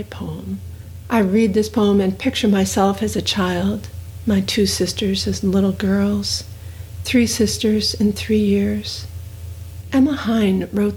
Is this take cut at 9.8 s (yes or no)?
yes